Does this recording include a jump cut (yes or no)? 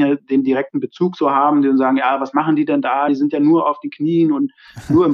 no